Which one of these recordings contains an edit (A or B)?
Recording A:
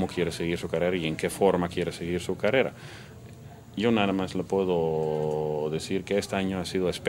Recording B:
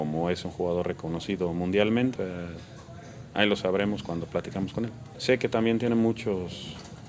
B